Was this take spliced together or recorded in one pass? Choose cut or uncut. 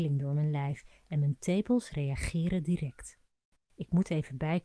cut